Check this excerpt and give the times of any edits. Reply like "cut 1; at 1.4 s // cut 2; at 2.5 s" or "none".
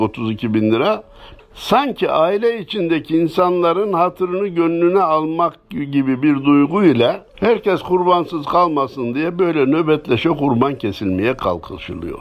cut 1; at 1.4 s // cut 2; at 7.3 s